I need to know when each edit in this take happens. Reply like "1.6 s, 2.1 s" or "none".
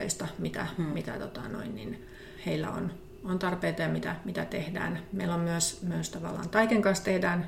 none